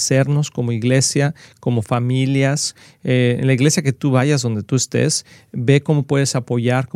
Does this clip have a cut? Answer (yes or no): no